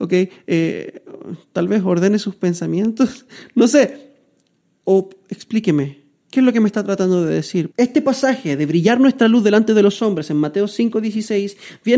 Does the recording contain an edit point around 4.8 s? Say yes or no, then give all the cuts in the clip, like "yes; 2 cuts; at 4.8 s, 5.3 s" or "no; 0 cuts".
no; 1 cut; at 7.7 s